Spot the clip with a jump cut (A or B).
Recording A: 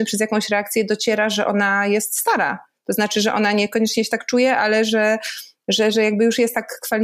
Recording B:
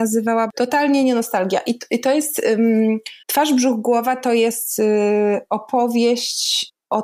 B